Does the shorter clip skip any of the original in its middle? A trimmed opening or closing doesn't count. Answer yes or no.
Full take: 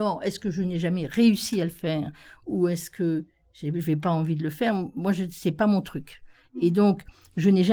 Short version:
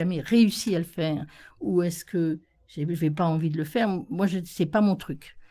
no